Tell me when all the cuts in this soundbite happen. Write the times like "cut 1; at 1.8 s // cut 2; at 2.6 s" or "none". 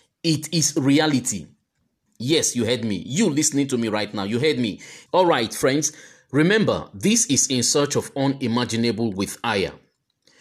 cut 1; at 2.1 s // cut 2; at 5.1 s